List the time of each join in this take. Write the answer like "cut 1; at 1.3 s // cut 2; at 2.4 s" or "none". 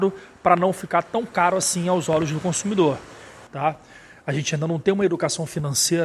cut 1; at 3.5 s